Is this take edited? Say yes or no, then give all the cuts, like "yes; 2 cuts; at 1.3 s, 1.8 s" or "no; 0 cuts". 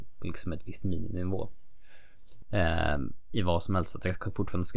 yes; 1 cut; at 2.4 s